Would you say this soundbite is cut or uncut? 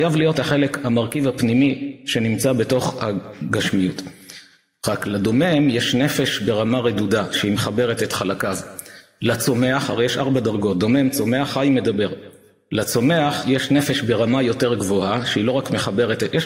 uncut